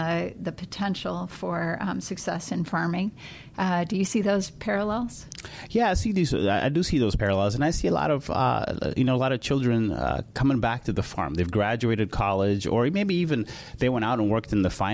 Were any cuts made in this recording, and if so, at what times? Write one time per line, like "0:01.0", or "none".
none